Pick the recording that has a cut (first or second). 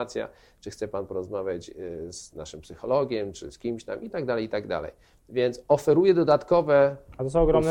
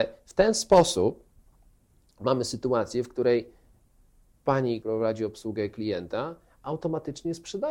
second